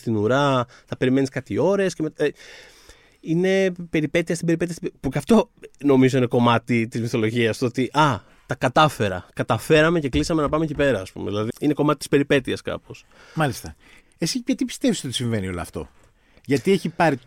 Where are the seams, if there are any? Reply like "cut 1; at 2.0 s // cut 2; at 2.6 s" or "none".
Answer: cut 1; at 11.5 s // cut 2; at 14.0 s